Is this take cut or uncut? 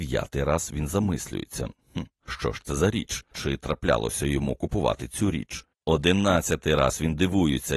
cut